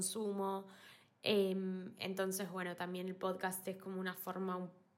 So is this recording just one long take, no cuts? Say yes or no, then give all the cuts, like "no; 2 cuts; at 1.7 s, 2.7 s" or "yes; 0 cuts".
no; 1 cut; at 1.0 s